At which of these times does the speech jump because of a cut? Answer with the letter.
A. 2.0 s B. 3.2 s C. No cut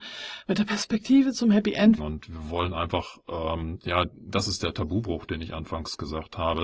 A